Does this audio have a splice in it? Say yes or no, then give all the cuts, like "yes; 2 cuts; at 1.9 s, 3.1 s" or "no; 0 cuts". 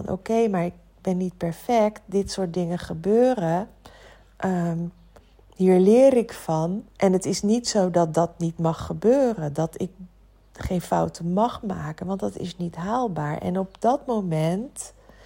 yes; 1 cut; at 6.9 s